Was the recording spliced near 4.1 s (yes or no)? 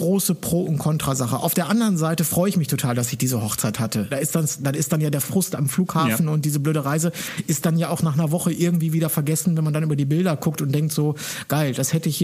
yes